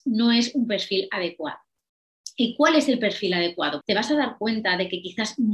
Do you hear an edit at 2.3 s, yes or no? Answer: no